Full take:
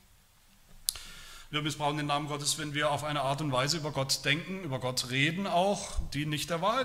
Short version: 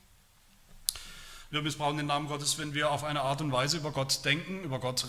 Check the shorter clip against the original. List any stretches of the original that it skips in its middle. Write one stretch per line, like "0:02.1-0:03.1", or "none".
none